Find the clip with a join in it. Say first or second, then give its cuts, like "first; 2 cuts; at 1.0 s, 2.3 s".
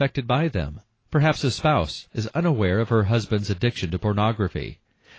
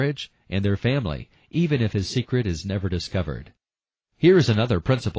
first; 1 cut; at 2.1 s